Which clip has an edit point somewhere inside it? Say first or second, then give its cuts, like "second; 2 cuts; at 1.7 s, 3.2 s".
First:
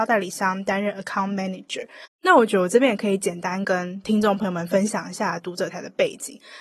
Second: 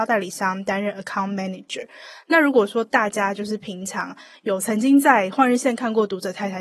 first; 2 cuts; at 2.0 s, 5.7 s